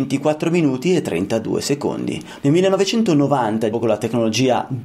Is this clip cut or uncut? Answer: cut